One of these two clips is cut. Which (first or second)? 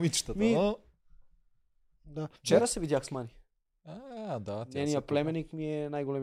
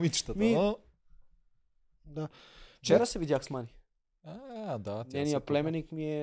first